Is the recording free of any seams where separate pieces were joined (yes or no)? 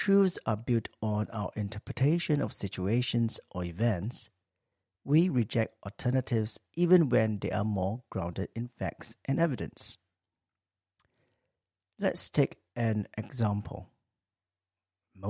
yes